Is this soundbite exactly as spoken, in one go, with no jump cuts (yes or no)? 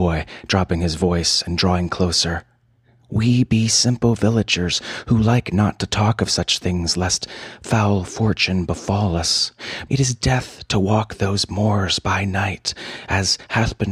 no